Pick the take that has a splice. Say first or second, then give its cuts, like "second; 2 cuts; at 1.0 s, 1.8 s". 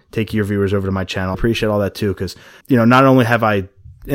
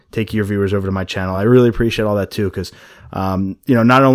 first; 2 cuts; at 1.3 s, 2.6 s